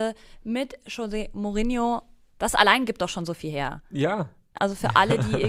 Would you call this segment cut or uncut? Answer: cut